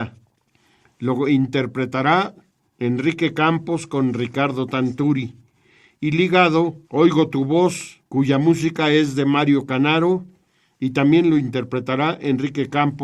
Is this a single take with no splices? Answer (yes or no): no